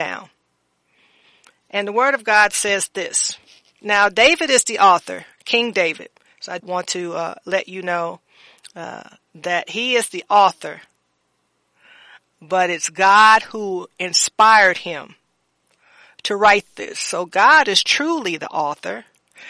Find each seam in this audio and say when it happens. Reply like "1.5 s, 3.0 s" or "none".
6.6 s